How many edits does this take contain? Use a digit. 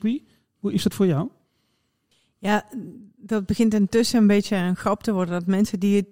0